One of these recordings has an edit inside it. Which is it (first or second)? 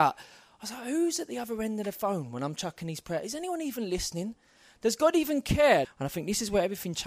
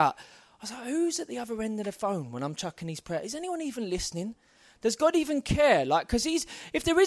first